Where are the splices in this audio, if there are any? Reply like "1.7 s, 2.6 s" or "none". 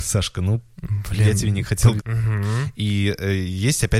2.0 s